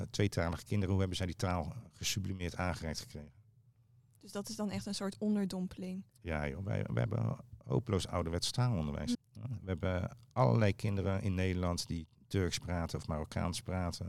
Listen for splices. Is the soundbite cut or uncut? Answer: cut